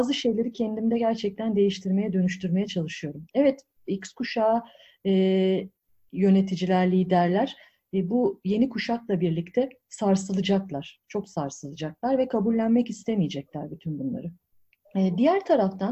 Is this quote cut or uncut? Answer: uncut